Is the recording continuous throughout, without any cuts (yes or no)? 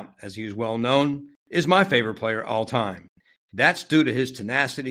yes